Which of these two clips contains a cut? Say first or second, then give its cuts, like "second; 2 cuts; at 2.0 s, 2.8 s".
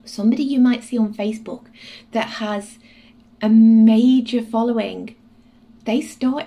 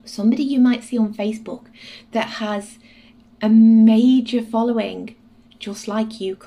second; 1 cut; at 5.5 s